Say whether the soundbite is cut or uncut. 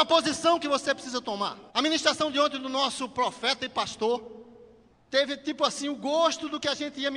cut